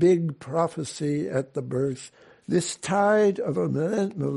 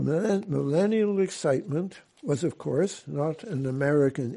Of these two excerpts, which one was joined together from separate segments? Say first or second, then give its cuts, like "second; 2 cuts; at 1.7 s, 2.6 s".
first; 1 cut; at 2.4 s